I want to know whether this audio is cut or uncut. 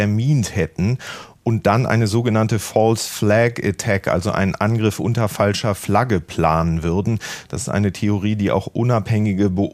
uncut